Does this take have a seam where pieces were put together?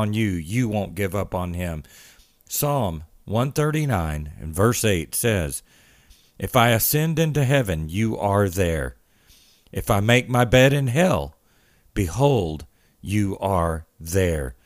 no; 0 cuts

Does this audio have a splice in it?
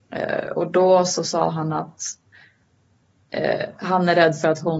no; 0 cuts

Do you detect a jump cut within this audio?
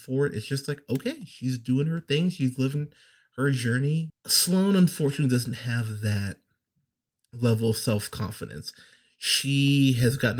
yes; 1 cut; at 4.1 s

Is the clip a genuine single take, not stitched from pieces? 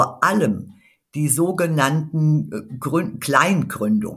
yes; 0 cuts

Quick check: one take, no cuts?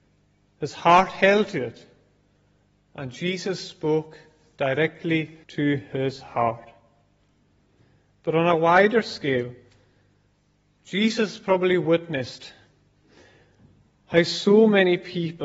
no; 1 cut; at 5.4 s

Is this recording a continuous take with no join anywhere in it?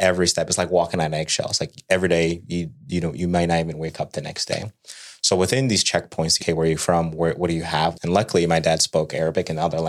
no; 2 cuts; at 6.4 s, 7.9 s

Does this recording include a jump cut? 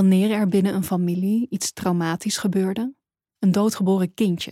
yes; 1 cut; at 3.3 s

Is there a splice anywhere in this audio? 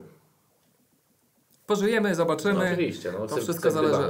no; 0 cuts

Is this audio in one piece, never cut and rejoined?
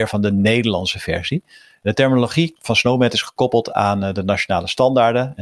yes; 0 cuts

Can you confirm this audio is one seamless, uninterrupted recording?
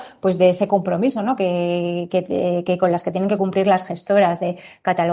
no; 1 cut; at 1.4 s

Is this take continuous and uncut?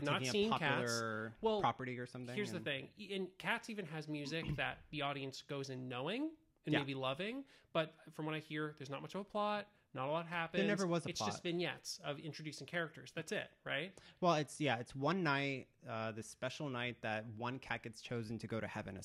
yes; 0 cuts

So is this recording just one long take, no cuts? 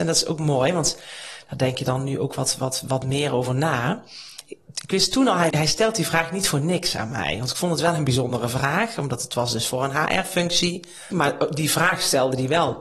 no; 2 cuts; at 5.5 s, 11.1 s

